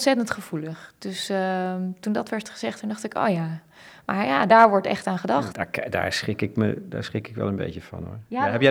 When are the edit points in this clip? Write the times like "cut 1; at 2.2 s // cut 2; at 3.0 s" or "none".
cut 1; at 4.5 s // cut 2; at 5.5 s